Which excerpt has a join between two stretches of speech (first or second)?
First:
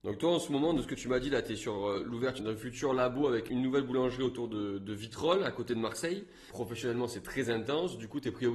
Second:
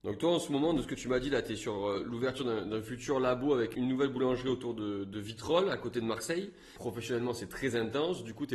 first